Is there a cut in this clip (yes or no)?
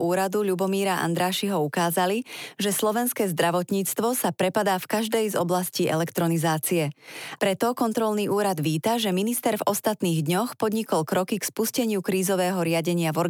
yes